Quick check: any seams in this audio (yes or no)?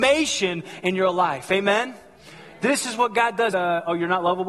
yes